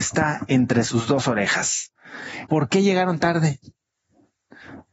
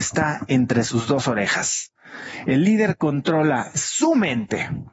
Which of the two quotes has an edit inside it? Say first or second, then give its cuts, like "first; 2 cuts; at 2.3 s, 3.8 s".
first; 1 cut; at 2.5 s